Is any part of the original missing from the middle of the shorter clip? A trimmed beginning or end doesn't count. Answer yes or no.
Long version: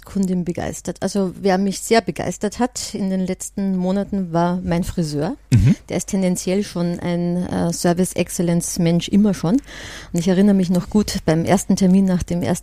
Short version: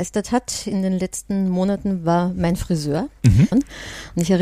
yes